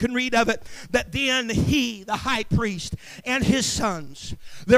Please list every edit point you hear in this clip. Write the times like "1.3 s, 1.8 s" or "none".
none